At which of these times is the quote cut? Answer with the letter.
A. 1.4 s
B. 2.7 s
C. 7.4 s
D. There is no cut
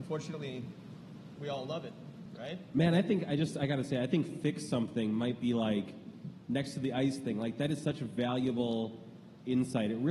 A